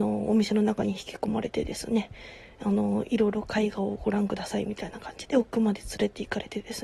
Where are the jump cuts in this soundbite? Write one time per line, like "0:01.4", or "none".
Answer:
0:05.3